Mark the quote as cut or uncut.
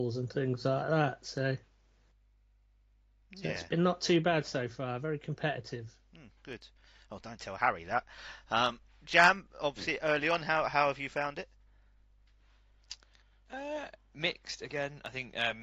uncut